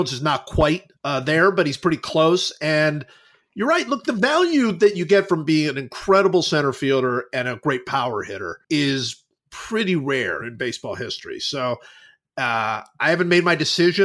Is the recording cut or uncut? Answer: cut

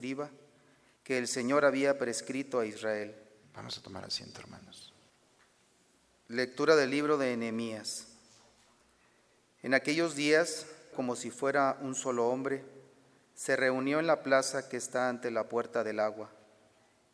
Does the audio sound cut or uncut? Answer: cut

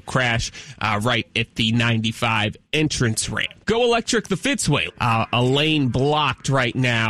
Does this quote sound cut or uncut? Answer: cut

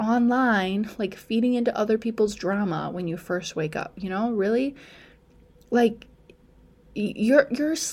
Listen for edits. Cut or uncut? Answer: uncut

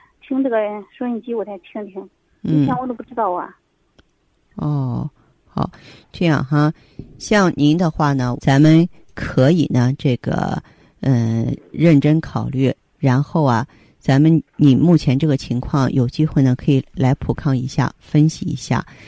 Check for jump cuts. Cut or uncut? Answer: cut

